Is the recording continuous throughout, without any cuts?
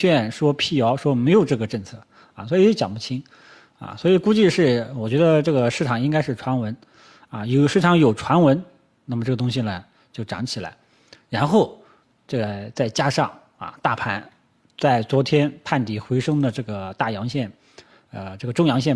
yes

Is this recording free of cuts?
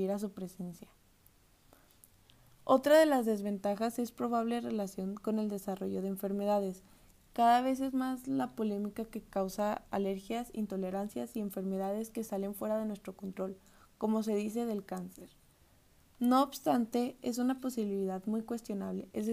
yes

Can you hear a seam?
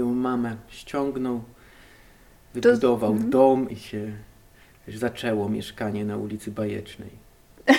yes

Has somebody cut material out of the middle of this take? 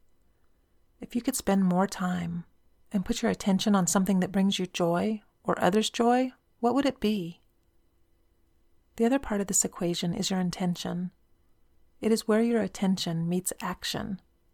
yes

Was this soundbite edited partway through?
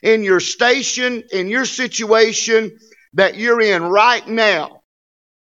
yes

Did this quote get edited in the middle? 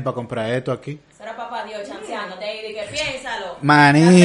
no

